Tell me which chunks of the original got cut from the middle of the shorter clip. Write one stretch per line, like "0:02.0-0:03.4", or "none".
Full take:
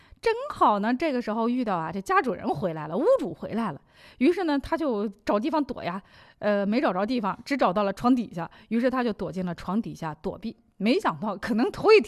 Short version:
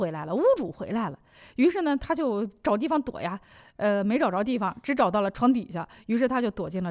none